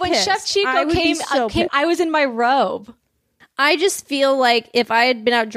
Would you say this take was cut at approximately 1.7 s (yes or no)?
yes